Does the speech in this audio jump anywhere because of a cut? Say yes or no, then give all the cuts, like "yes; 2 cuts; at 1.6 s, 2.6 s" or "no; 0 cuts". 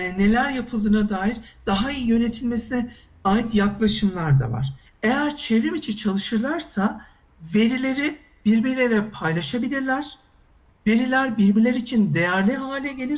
yes; 1 cut; at 4.9 s